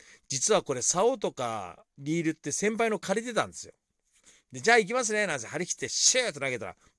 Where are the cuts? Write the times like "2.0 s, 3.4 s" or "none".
none